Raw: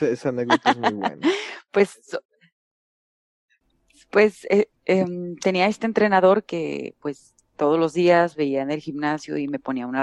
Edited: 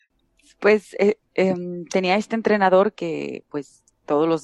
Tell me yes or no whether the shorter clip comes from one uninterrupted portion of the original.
yes